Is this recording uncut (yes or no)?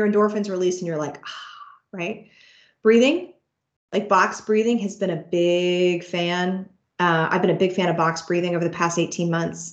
yes